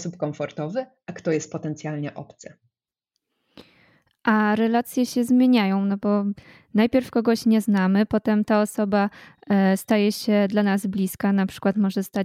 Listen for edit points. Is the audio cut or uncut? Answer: cut